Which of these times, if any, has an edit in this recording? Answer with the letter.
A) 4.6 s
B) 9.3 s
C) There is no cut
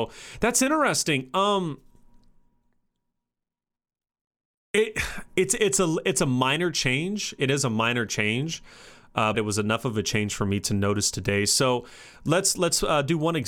B